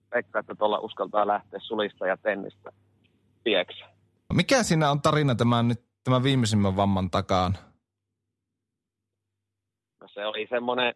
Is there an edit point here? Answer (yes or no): yes